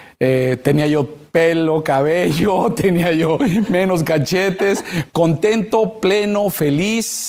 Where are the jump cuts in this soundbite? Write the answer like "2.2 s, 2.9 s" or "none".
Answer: 5.1 s

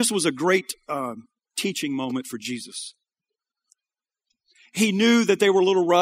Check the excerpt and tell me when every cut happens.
none

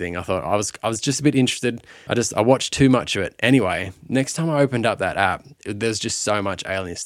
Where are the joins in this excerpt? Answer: 2.1 s

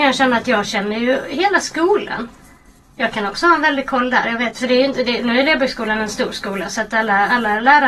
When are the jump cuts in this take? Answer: none

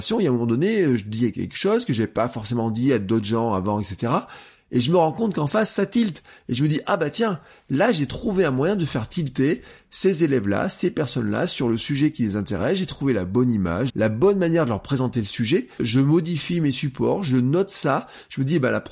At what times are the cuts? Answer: 13.9 s, 15.8 s

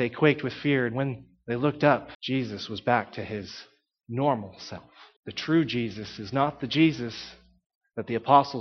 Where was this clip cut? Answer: 2.1 s, 5.2 s

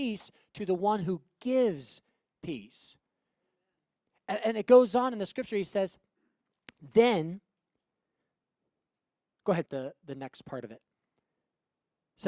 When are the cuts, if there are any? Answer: 9.7 s

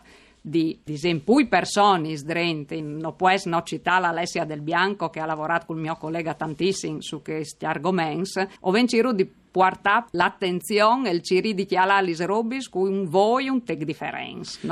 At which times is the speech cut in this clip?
2.8 s, 8.6 s, 10.1 s

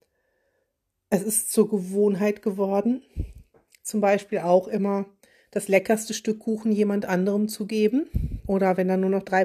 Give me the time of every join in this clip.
none

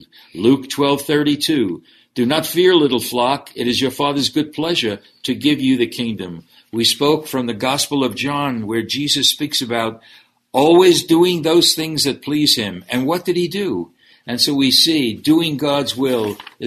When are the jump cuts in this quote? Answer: 14.1 s

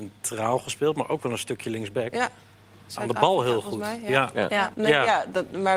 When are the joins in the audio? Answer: 4.7 s

